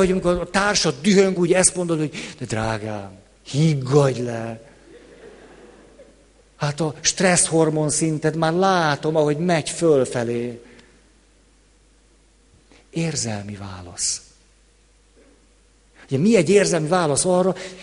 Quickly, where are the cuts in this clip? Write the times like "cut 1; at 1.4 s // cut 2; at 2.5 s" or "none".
cut 1; at 1.4 s